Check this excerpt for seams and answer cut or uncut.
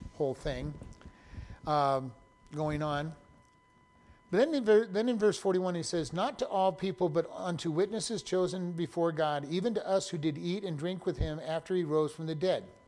uncut